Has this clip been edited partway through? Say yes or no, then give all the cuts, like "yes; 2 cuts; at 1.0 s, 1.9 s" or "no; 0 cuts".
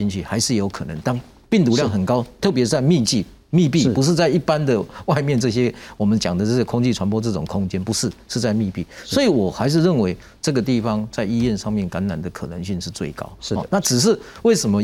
no; 0 cuts